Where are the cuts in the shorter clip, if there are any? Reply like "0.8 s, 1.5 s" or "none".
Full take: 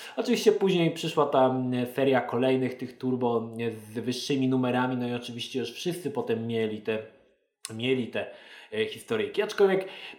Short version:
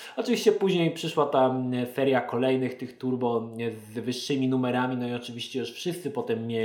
none